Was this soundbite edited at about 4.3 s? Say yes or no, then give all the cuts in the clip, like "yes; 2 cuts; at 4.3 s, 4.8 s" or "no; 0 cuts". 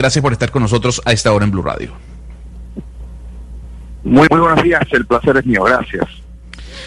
yes; 1 cut; at 4.3 s